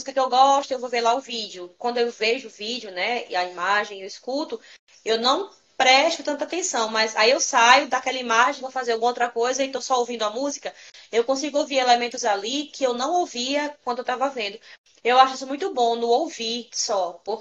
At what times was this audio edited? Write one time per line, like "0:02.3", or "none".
none